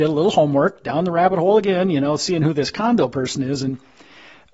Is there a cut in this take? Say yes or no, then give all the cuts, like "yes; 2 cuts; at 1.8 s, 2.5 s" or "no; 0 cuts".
no; 0 cuts